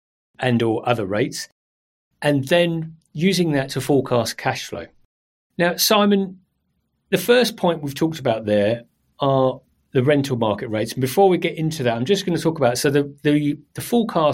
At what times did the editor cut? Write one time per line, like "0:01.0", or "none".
none